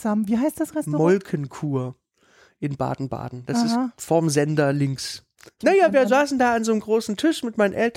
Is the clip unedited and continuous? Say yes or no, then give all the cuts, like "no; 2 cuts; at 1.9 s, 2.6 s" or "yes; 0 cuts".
no; 1 cut; at 5.6 s